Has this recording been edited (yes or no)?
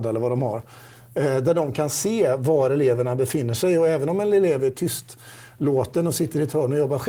no